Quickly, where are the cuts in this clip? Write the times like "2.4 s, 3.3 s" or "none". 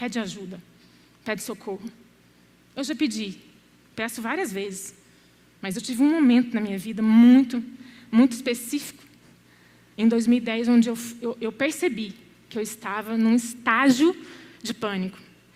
none